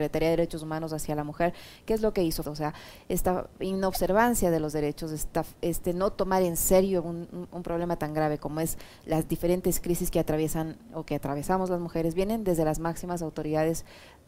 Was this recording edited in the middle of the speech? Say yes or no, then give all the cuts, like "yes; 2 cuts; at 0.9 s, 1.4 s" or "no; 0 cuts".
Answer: yes; 1 cut; at 2.4 s